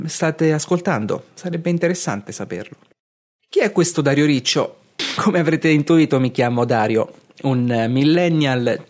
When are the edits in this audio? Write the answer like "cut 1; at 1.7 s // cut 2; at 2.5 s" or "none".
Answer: cut 1; at 5.0 s